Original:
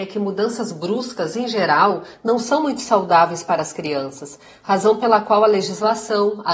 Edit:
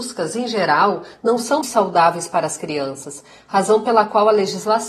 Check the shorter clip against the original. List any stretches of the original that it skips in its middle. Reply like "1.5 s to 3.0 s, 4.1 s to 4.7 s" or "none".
2.6 s to 2.8 s